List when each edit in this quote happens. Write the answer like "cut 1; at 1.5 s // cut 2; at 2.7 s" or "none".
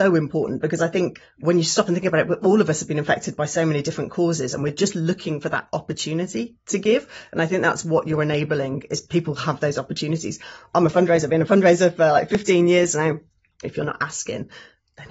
cut 1; at 13.6 s